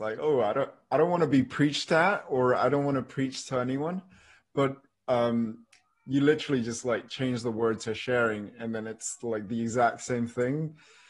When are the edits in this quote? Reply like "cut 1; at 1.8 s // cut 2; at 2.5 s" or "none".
none